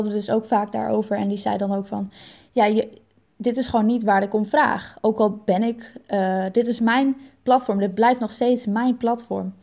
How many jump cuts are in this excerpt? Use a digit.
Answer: 0